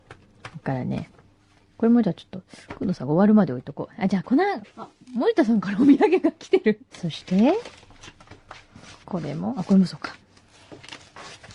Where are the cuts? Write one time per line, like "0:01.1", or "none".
0:04.6
0:06.9
0:09.0